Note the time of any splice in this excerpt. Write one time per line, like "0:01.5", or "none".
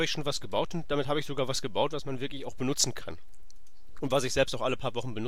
none